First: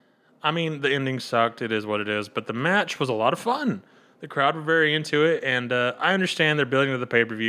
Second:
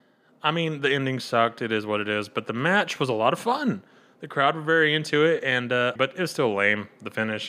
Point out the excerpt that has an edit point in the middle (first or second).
second